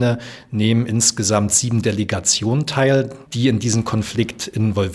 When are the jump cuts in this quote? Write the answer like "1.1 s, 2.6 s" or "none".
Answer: 3.2 s